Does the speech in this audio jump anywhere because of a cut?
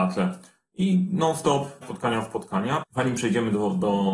yes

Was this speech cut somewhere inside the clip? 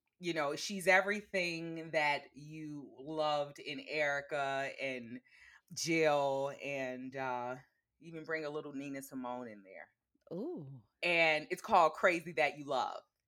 yes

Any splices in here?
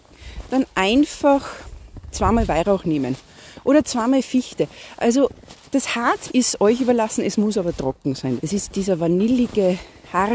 yes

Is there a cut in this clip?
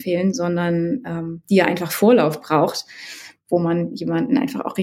no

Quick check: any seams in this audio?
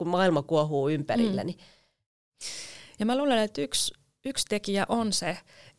yes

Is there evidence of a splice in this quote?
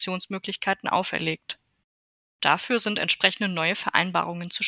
yes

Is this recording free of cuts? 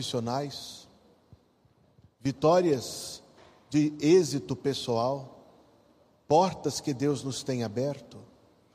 yes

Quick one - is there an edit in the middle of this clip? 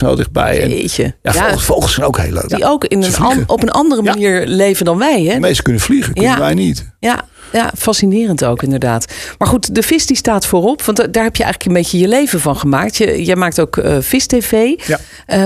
yes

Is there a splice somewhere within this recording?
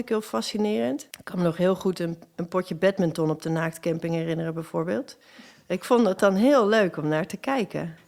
yes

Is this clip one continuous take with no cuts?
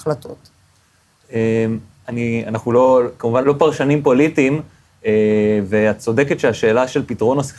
no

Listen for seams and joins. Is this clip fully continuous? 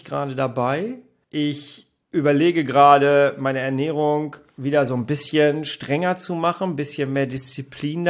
yes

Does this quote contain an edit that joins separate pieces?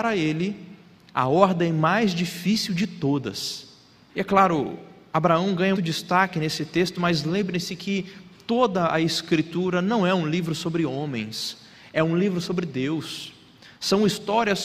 yes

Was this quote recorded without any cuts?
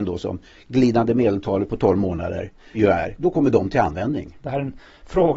no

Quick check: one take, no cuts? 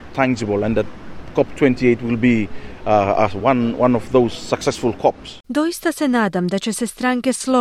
yes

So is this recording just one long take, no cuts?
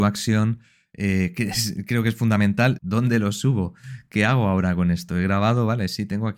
no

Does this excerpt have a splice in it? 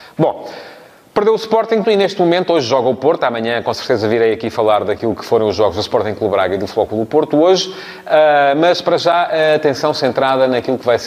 yes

